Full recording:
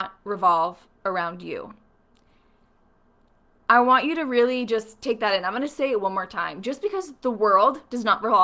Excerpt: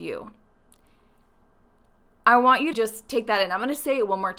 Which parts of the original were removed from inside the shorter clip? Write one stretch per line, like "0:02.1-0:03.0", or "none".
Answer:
0:04.2-0:04.7